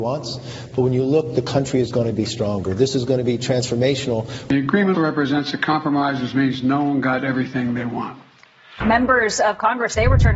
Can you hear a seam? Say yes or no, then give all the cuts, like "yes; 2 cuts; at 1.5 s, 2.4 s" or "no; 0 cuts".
yes; 2 cuts; at 4.9 s, 8.8 s